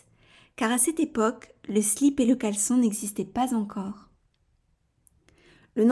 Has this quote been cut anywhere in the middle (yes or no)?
no